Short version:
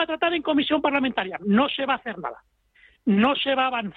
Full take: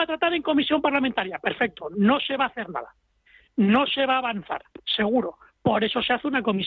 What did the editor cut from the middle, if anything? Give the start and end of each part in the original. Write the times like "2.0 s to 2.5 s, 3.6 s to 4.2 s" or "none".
1.4 s to 1.9 s